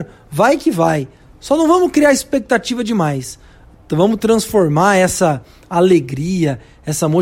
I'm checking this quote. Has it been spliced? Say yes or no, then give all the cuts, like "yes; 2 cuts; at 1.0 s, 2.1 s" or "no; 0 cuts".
no; 0 cuts